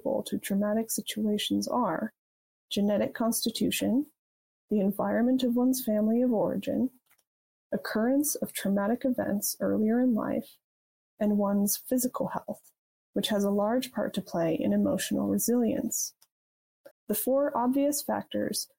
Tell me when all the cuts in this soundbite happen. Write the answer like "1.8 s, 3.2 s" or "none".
16.9 s

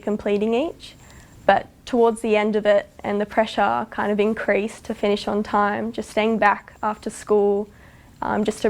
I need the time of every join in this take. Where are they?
none

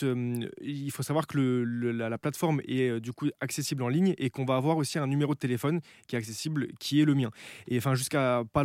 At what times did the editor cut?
none

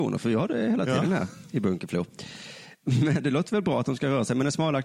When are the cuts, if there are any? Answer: 3.2 s

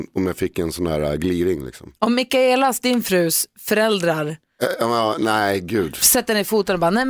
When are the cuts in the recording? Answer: none

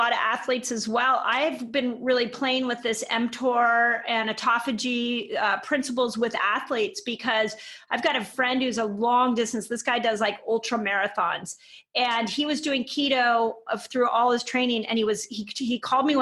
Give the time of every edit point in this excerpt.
none

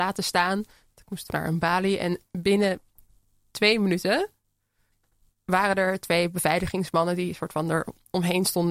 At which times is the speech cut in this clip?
1.3 s

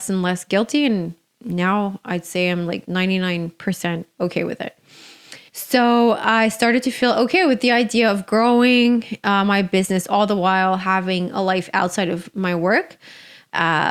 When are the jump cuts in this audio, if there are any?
5.5 s

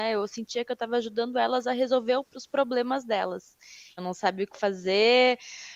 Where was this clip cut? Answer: 4.0 s

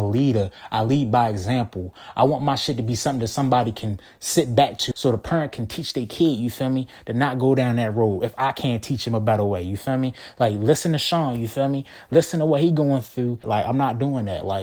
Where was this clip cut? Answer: 4.9 s, 13.4 s

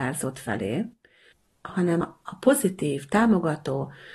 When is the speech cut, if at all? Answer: 2.0 s

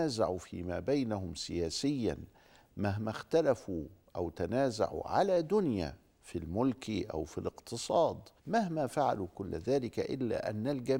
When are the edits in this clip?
8.4 s

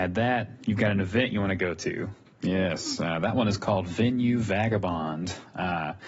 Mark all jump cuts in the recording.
2.3 s

